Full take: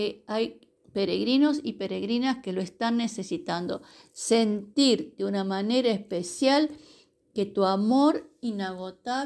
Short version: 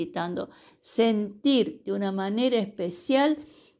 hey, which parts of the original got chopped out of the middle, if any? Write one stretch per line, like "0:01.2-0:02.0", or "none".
none